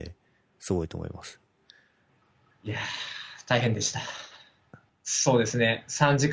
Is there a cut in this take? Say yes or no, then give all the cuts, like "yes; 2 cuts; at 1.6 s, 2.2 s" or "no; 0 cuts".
yes; 1 cut; at 4.9 s